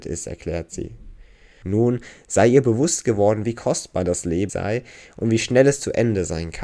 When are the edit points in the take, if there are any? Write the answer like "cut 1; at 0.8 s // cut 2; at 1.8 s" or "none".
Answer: cut 1; at 1.6 s // cut 2; at 4.5 s